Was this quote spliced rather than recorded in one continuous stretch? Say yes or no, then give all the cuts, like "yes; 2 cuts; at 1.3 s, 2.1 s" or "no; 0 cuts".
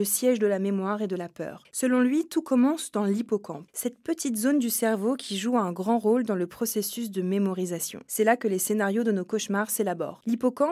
yes; 1 cut; at 1.7 s